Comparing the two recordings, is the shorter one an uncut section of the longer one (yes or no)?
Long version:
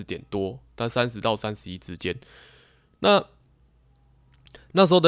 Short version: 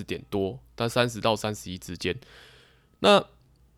yes